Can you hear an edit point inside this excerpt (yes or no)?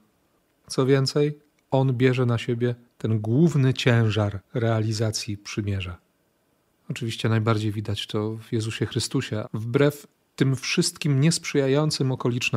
yes